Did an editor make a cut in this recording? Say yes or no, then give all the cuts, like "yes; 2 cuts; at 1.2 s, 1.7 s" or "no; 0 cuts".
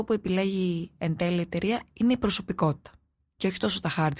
no; 0 cuts